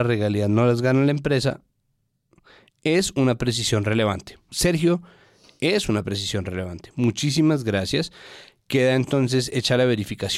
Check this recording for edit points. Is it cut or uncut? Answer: uncut